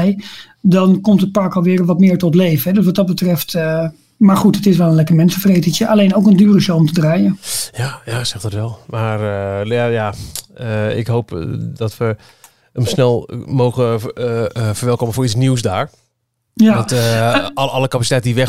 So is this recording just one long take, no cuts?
yes; 0 cuts

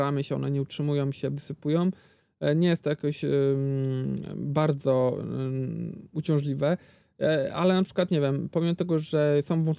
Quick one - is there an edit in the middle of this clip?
no; 0 cuts

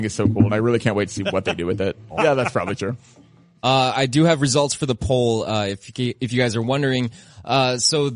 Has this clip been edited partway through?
yes; 1 cut; at 2.1 s

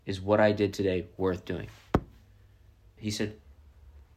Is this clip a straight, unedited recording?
no; 1 cut; at 3.0 s

